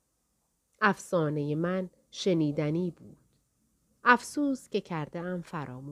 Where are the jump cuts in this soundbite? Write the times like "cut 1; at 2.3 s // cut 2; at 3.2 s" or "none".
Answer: none